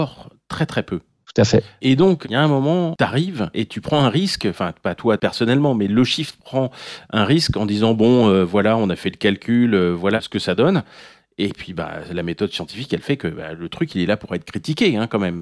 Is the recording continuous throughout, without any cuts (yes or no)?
yes